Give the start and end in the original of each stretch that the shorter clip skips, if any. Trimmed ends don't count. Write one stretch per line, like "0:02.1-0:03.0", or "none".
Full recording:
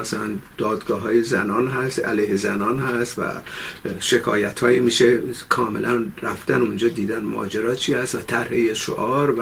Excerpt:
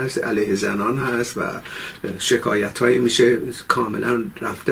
none